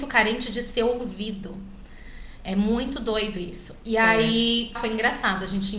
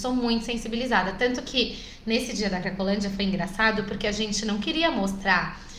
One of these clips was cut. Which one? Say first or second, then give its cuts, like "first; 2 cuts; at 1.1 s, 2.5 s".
first; 1 cut; at 4.7 s